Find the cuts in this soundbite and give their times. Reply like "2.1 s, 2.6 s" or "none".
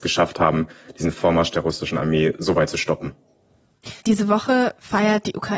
4.0 s